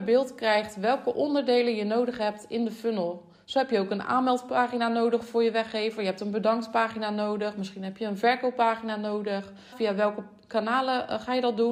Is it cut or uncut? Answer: cut